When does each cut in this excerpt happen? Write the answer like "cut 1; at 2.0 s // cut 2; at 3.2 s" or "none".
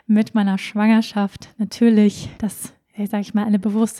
cut 1; at 2.4 s

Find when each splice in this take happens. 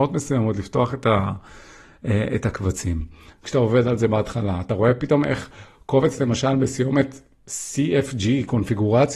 cut 1; at 3.3 s

